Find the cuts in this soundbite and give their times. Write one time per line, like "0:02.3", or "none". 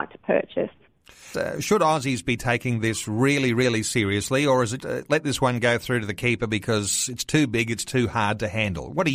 0:01.3
0:04.8